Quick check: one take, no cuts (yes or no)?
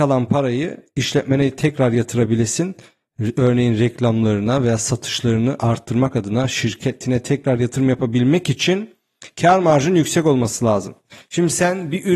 yes